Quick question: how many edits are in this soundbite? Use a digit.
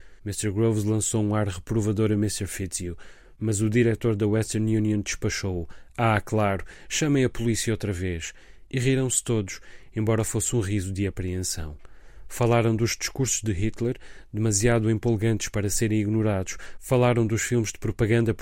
0